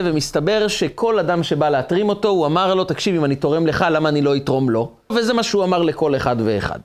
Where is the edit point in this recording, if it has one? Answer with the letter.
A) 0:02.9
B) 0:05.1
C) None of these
B